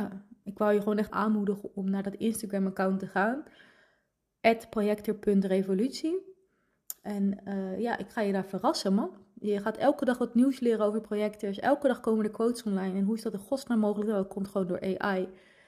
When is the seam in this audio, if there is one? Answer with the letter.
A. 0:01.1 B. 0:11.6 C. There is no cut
A